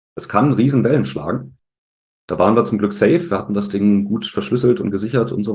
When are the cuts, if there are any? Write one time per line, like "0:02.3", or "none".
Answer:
none